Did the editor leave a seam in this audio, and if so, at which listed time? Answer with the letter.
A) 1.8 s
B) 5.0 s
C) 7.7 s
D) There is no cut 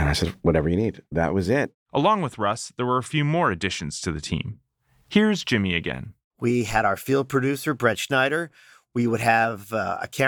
D